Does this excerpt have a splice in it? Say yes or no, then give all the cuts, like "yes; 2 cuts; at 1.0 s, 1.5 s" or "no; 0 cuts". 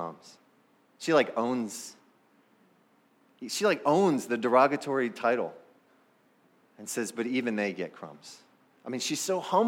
no; 0 cuts